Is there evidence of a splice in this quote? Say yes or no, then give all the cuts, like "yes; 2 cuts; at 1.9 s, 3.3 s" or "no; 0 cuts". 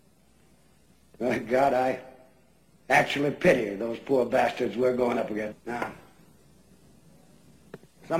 yes; 1 cut; at 5.5 s